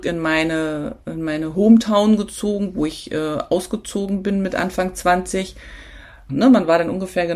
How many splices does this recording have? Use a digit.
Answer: 1